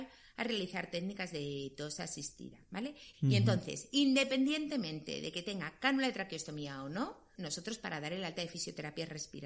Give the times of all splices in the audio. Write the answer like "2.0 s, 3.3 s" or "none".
3.1 s, 7.4 s